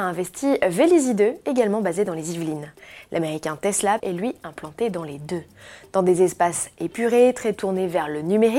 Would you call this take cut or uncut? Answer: cut